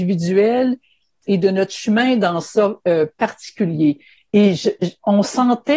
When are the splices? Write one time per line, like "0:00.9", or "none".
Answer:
0:04.2